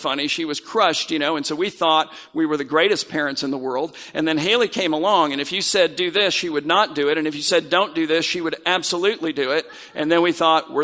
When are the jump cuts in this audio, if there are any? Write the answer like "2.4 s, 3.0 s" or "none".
none